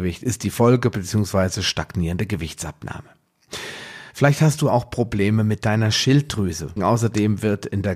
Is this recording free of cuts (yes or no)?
no